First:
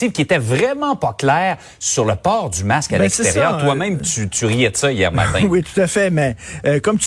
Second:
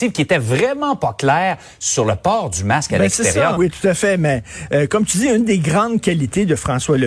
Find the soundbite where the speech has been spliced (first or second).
second